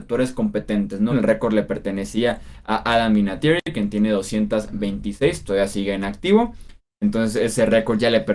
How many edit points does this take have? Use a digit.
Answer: 1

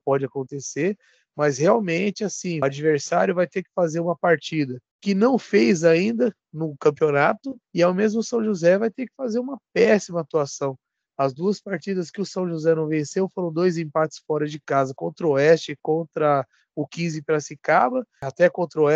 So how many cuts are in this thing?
0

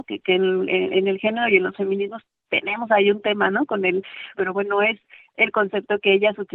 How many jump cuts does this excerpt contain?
1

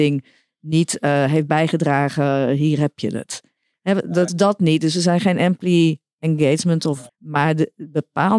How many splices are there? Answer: 2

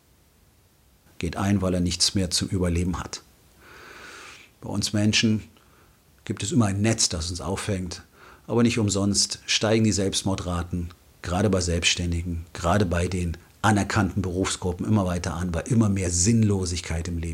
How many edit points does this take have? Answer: 1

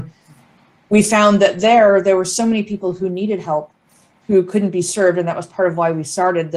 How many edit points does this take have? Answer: 0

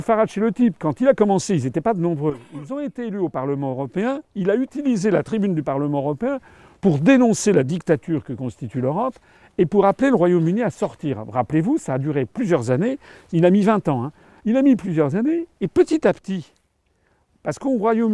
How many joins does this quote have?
1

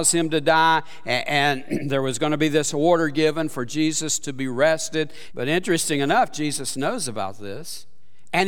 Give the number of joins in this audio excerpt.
1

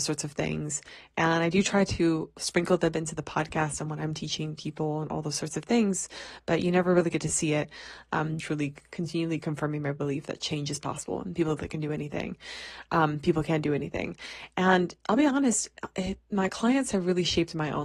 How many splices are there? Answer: 1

